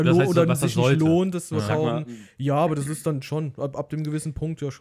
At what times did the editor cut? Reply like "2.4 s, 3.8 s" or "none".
none